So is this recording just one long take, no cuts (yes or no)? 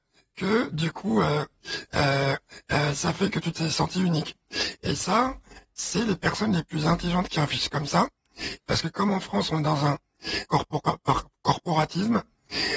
no